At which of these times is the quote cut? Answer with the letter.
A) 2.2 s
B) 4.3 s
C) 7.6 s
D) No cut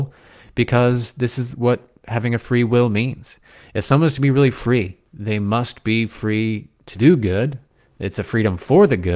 D